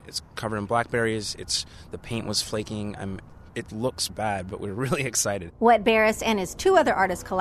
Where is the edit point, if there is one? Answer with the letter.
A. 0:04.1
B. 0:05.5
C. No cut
A